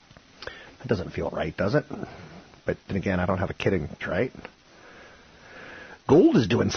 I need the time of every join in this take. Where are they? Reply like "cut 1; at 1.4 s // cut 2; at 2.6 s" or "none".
cut 1; at 4.0 s